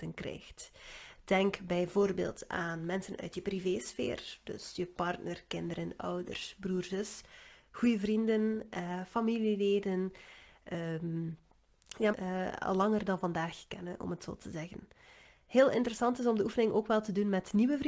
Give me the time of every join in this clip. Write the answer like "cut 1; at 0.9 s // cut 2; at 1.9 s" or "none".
cut 1; at 12.1 s

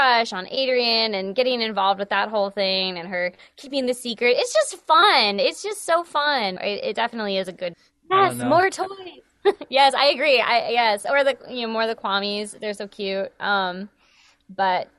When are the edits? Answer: cut 1; at 6.6 s // cut 2; at 7.7 s

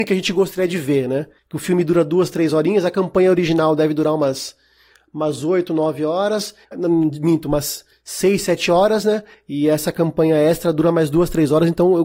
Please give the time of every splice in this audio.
cut 1; at 6.7 s

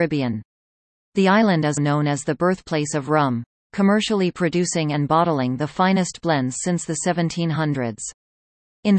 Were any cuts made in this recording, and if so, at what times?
cut 1; at 1.8 s

